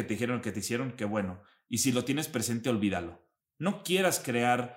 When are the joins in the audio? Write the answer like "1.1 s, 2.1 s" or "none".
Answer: 3.4 s